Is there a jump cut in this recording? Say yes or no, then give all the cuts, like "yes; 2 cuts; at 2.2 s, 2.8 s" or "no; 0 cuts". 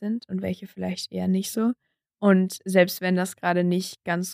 no; 0 cuts